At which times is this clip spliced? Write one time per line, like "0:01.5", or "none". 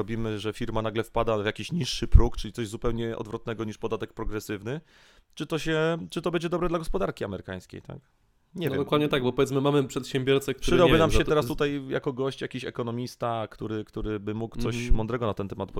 none